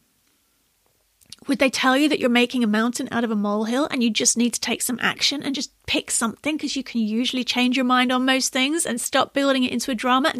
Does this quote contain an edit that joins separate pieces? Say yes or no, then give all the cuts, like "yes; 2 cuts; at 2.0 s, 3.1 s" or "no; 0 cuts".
no; 0 cuts